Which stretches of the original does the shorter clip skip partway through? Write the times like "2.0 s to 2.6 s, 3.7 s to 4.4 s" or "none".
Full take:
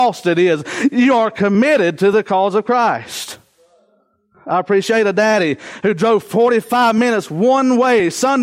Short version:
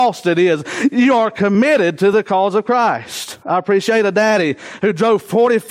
3.4 s to 4.4 s